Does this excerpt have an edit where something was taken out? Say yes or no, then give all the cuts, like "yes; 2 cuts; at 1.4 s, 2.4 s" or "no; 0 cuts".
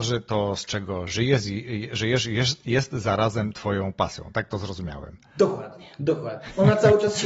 no; 0 cuts